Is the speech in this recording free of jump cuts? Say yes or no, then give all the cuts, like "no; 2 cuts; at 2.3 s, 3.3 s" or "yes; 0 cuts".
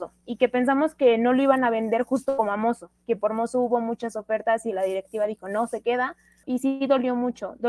no; 1 cut; at 6.4 s